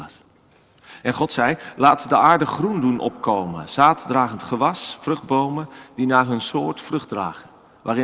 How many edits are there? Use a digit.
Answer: 0